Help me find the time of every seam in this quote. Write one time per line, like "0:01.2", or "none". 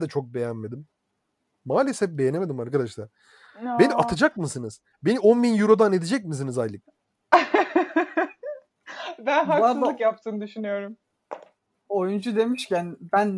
none